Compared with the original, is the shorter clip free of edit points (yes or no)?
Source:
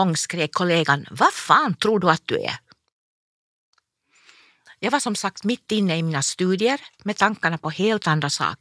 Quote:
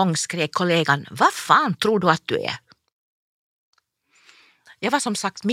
yes